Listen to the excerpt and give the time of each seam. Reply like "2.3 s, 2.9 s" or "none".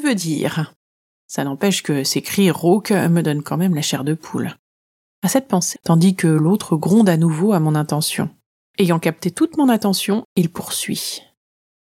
5.8 s, 8.6 s